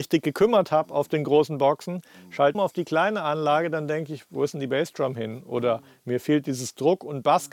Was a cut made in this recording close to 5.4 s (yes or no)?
no